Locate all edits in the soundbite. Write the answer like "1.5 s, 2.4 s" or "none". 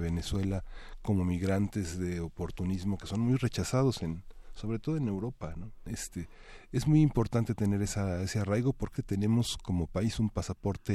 5.9 s, 9.0 s